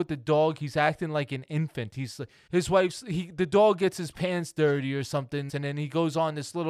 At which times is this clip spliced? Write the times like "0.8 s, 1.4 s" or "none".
2.5 s, 5.5 s